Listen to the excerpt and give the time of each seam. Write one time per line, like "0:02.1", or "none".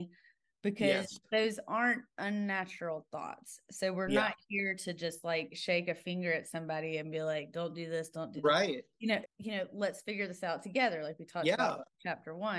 0:09.2